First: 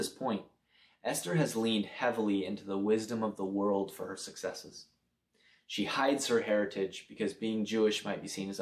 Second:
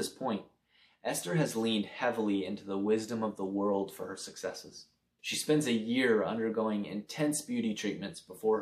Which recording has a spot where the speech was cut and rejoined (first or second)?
second